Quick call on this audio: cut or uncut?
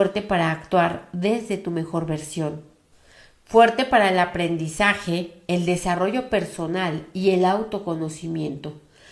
uncut